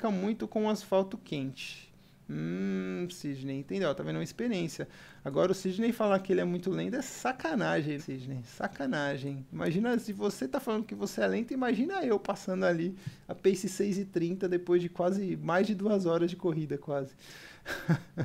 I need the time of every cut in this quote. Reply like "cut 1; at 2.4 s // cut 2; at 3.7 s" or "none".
cut 1; at 8.0 s